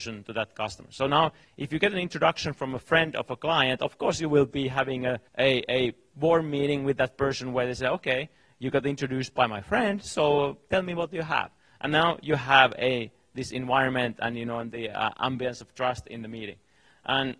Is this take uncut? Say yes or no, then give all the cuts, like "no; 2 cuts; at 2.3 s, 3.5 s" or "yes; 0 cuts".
no; 1 cut; at 5.3 s